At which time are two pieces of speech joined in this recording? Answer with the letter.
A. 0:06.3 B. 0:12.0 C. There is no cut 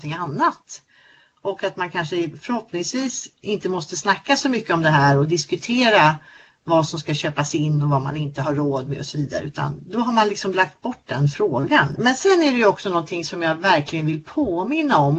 B